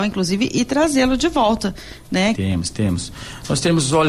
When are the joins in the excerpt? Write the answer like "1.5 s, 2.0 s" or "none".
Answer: 2.3 s